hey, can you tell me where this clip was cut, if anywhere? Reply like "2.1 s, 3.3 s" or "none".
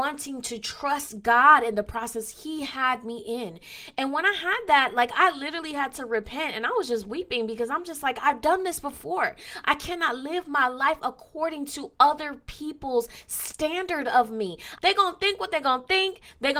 9.6 s, 14.8 s